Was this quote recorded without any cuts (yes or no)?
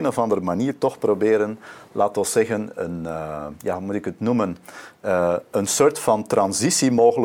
no